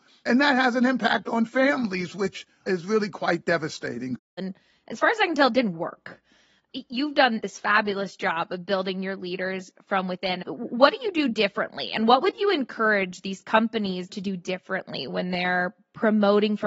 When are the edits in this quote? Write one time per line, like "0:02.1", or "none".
0:04.4